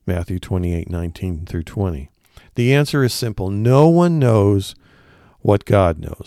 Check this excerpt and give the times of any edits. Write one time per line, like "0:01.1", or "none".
none